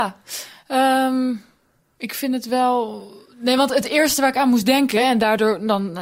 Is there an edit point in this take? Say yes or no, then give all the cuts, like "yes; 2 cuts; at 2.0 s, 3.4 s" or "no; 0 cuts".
no; 0 cuts